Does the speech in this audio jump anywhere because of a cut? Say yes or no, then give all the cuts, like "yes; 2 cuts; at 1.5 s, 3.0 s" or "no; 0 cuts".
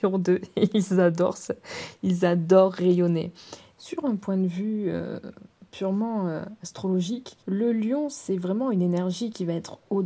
yes; 2 cuts; at 3.7 s, 7.4 s